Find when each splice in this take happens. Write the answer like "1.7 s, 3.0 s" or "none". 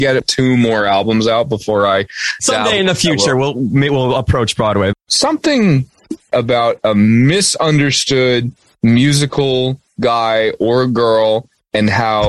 4.9 s